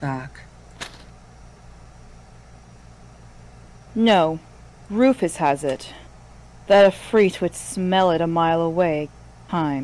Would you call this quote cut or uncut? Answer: uncut